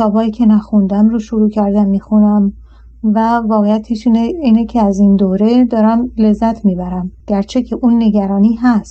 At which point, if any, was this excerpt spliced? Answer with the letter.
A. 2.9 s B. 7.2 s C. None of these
B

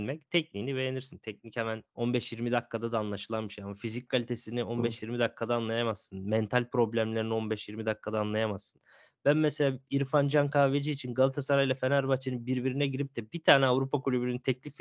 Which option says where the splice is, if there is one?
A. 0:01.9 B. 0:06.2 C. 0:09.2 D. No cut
A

